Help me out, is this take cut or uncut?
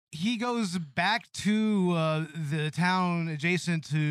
uncut